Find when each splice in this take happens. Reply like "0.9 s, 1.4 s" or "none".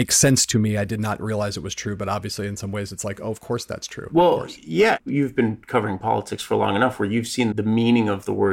5.0 s, 7.5 s